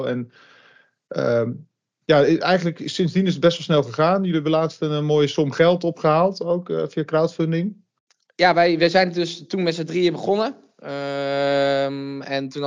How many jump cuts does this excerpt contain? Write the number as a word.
zero